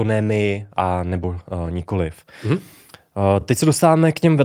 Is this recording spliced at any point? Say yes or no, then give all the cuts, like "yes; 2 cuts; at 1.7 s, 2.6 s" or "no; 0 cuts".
no; 0 cuts